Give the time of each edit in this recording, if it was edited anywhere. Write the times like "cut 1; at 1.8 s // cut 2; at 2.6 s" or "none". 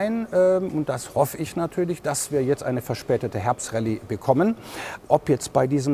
cut 1; at 5.0 s